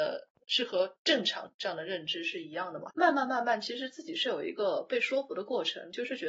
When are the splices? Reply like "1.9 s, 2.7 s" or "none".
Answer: 2.9 s